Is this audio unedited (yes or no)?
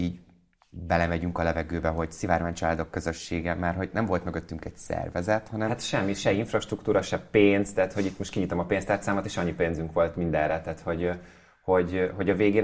yes